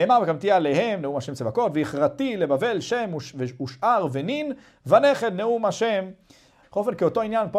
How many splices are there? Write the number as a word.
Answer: one